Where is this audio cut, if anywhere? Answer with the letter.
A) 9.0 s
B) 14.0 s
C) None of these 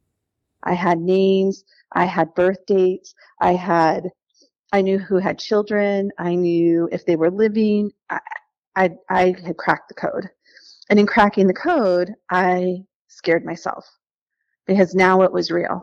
C